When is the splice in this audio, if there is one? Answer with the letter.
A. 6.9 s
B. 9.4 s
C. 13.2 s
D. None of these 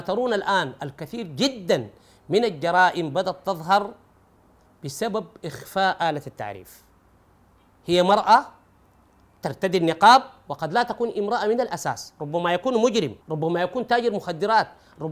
C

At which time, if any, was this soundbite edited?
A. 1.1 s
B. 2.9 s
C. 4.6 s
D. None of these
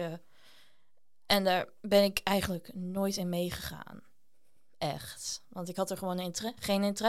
D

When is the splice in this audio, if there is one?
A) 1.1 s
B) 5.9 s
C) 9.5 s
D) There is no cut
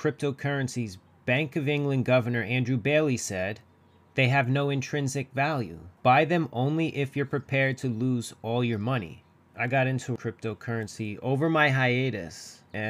C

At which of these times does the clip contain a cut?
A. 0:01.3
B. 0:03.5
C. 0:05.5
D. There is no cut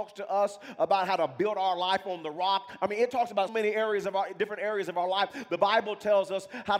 B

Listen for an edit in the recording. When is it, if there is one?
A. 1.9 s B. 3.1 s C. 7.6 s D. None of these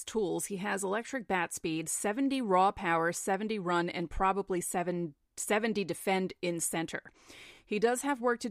D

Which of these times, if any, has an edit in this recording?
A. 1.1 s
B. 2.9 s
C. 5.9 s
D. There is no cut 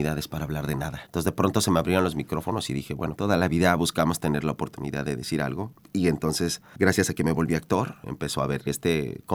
A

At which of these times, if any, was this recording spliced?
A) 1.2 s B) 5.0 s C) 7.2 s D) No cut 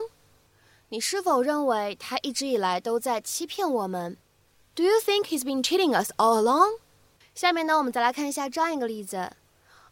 C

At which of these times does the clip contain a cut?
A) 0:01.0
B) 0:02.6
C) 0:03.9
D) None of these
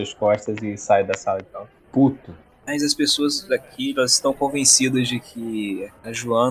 B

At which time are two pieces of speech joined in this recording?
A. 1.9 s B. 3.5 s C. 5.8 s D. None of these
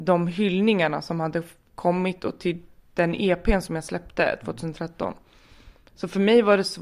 D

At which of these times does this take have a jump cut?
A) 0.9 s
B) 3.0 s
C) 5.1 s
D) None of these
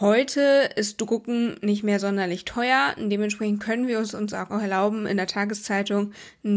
D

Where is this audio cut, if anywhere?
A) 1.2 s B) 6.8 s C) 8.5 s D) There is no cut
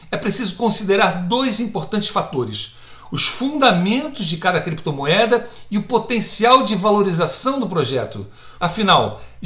C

